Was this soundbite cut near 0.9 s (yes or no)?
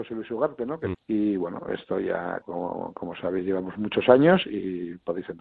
yes